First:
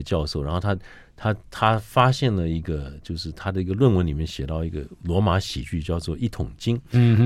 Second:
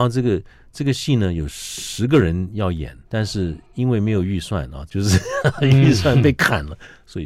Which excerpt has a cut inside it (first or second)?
second